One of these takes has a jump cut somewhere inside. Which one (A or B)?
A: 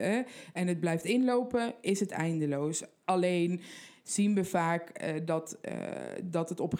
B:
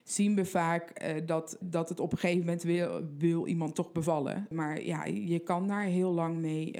B